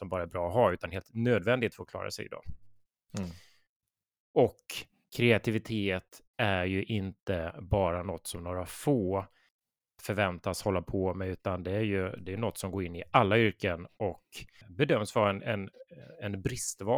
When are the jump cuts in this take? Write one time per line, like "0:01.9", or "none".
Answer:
none